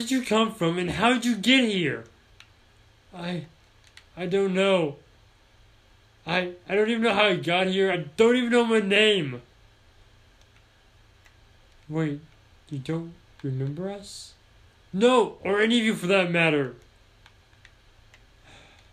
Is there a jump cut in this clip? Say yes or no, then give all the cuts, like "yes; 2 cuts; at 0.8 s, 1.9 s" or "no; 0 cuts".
no; 0 cuts